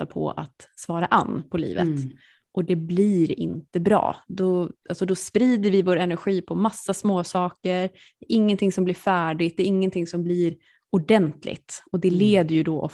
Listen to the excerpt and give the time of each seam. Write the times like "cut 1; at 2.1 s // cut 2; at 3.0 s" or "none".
none